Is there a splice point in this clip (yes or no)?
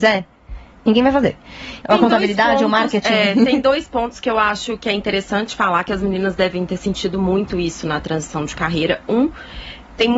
yes